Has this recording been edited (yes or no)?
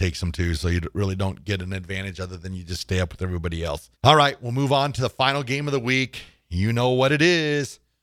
yes